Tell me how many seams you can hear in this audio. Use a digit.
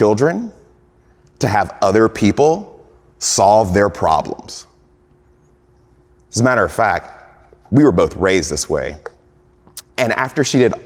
1